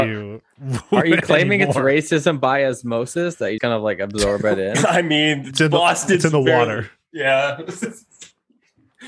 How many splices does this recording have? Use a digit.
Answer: 1